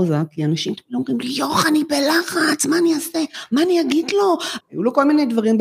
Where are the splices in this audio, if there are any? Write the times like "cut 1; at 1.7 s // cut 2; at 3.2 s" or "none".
cut 1; at 4.6 s